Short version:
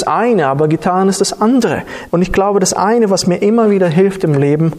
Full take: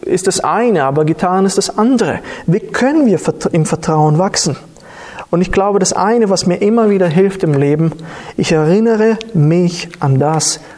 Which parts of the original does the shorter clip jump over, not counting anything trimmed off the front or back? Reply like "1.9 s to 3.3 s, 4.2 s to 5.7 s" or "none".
2.5 s to 5.3 s